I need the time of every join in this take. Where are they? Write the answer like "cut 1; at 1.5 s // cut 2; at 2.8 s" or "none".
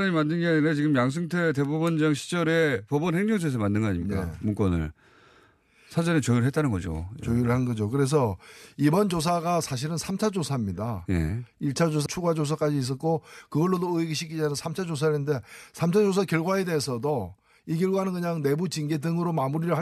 cut 1; at 12.1 s

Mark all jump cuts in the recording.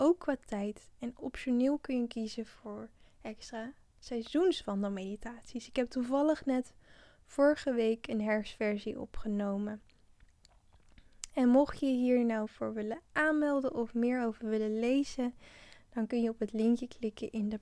none

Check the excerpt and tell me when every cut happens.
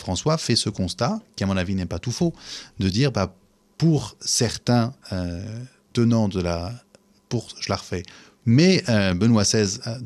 cut 1; at 8.4 s

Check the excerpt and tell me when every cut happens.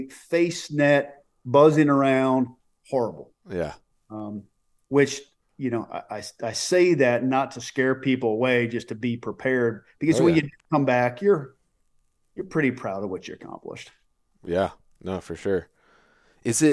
none

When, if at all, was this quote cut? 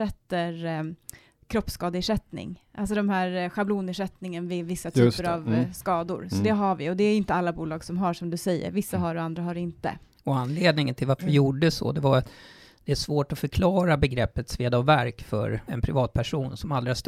cut 1; at 15.7 s

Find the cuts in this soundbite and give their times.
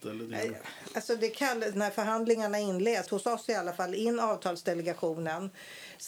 cut 1; at 1.7 s // cut 2; at 3.1 s

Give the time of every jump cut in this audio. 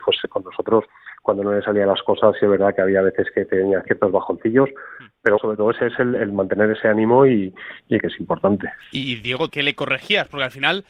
cut 1; at 5.4 s // cut 2; at 8.0 s // cut 3; at 9.5 s

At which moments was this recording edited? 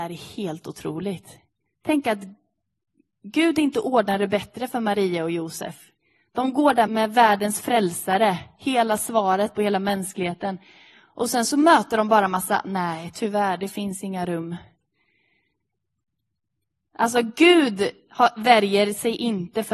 cut 1; at 6.9 s

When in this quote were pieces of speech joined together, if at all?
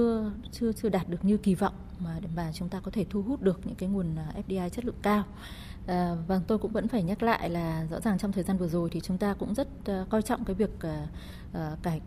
cut 1; at 5.8 s // cut 2; at 9.0 s

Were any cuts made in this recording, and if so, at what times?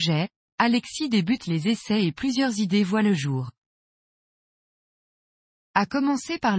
none

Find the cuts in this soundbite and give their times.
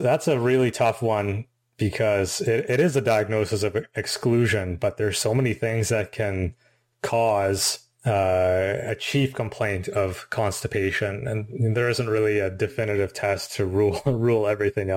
none

